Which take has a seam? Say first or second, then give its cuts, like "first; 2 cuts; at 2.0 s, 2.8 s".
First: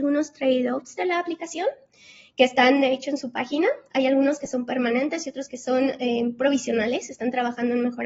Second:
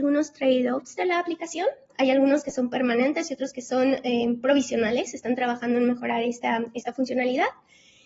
second; 1 cut; at 1.9 s